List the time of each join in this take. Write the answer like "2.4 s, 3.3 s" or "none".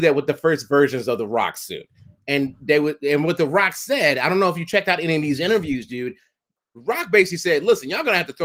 none

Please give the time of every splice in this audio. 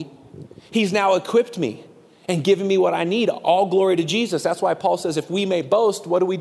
none

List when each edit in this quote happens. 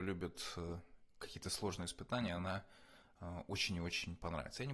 none

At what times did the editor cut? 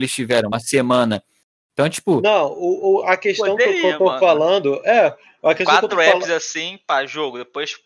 none

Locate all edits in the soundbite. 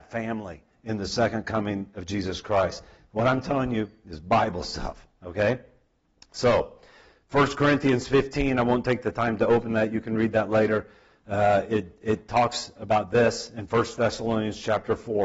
none

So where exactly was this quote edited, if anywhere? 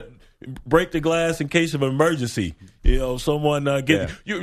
none

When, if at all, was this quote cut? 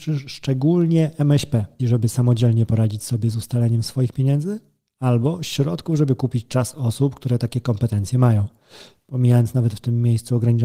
1.8 s

